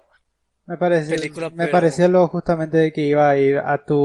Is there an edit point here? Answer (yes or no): no